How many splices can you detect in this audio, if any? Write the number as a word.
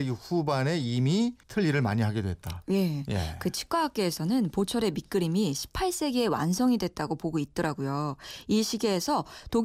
one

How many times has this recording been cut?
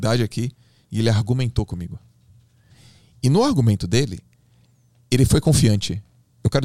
zero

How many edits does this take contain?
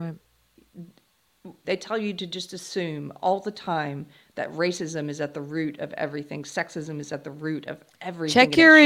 one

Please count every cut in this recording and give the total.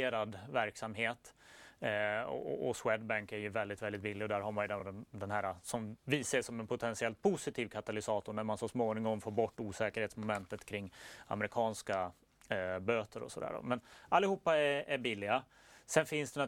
zero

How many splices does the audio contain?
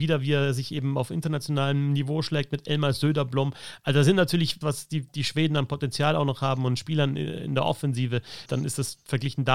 two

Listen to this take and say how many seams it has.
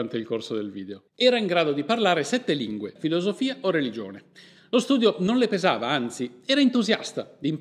two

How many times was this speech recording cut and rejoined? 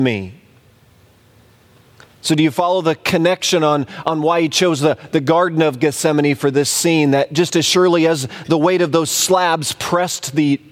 zero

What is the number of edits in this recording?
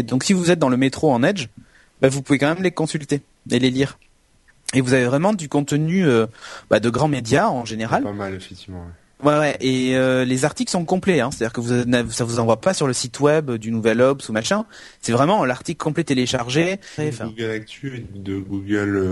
one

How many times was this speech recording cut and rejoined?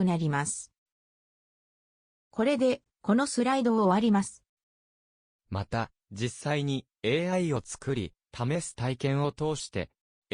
one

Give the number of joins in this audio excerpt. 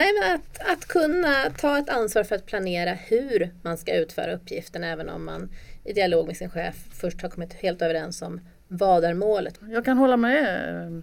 one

